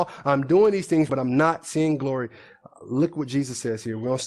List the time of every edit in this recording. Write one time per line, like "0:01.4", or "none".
0:01.1